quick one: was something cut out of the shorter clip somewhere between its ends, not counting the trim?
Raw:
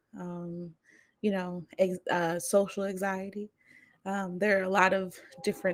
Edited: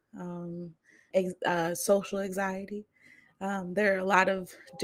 yes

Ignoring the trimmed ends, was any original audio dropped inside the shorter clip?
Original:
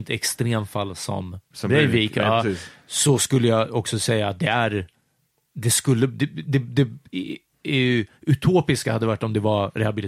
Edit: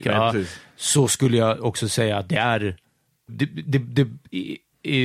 yes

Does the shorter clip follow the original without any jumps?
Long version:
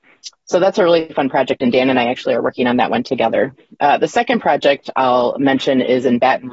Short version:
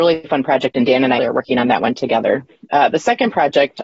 no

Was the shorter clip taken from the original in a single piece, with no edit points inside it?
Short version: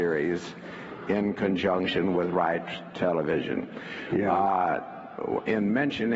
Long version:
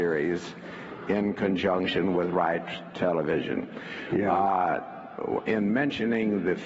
yes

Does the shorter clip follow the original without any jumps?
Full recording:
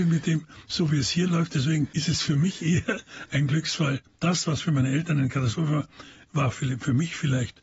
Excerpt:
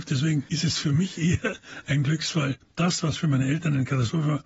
yes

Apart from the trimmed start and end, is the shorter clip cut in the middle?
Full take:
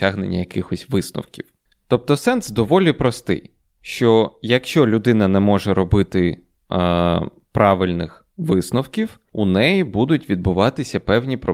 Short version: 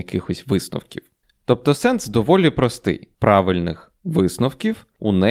yes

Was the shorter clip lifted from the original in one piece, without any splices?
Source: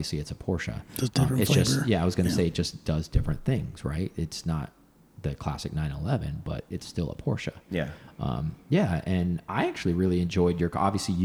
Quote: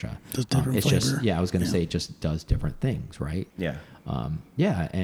no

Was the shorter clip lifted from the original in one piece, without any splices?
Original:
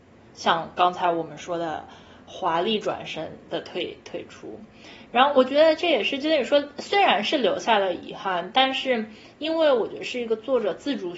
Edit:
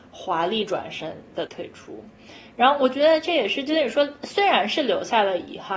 no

